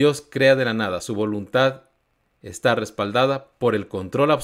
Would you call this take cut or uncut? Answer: uncut